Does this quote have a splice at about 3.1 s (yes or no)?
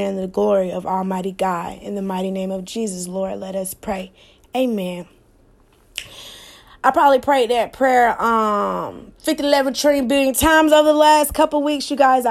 no